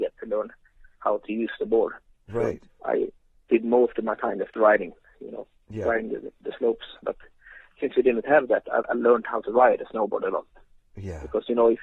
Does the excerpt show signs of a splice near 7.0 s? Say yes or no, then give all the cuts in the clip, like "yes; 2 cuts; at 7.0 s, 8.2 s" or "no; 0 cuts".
yes; 3 cuts; at 2.7 s, 7.0 s, 8.8 s